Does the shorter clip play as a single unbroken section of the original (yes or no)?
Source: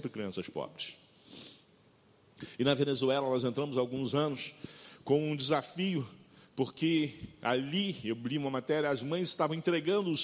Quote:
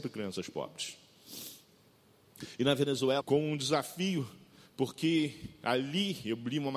no